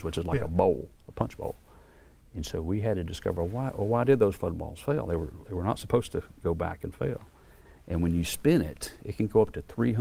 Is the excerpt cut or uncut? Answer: cut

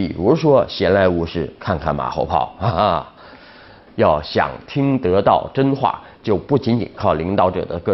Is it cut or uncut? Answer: cut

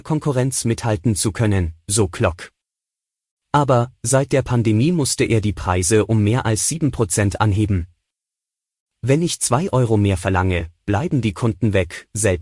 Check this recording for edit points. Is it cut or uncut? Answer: uncut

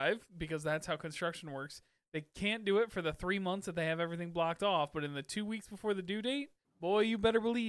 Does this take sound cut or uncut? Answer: cut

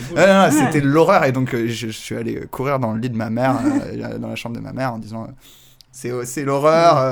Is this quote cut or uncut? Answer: uncut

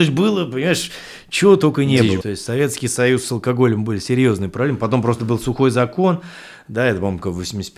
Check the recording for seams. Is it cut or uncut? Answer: cut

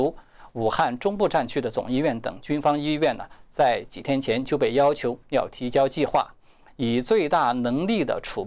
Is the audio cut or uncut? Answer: uncut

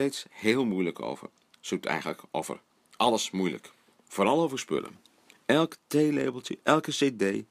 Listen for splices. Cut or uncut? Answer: uncut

